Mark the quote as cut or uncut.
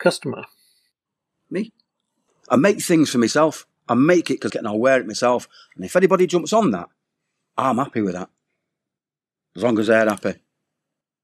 cut